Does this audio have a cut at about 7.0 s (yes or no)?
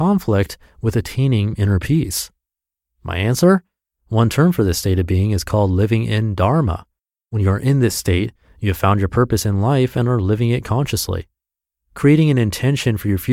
no